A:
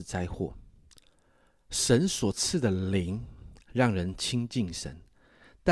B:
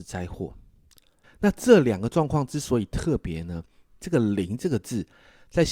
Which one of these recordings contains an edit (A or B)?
B